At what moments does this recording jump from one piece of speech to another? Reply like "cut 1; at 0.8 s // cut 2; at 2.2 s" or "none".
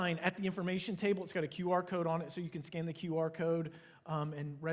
none